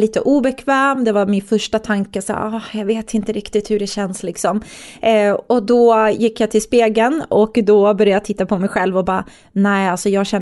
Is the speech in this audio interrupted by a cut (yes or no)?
no